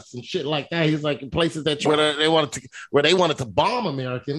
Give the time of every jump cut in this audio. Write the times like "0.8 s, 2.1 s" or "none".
1.9 s